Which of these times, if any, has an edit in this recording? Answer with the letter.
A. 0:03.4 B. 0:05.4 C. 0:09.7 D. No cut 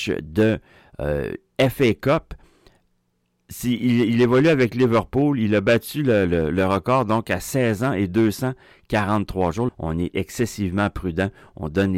C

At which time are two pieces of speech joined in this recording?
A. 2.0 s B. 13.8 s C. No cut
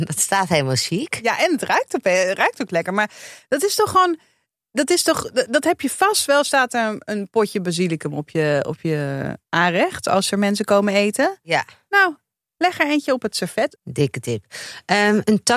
B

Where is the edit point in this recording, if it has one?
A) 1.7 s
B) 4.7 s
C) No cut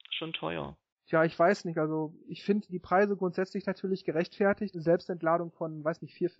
B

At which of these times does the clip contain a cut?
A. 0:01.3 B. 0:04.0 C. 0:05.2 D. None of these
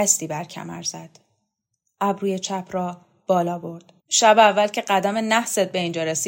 B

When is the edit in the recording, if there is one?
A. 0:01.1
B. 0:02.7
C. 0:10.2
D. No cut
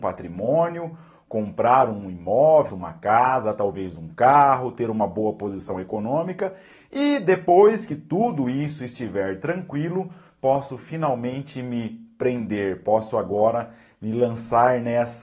B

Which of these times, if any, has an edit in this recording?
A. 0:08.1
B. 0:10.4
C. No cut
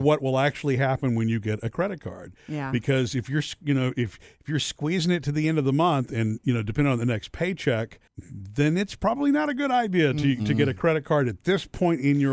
A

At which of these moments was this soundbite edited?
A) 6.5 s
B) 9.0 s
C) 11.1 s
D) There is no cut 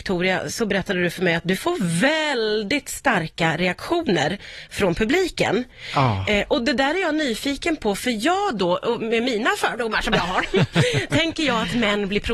D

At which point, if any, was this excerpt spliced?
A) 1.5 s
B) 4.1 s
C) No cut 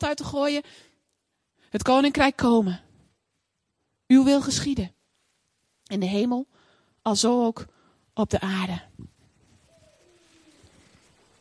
A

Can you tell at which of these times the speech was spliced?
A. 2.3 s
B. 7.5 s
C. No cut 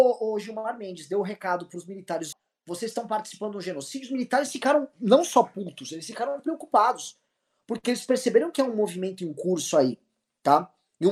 A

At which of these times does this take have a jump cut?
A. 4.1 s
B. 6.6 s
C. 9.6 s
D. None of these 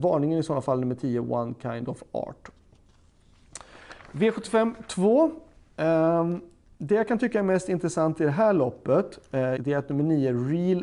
C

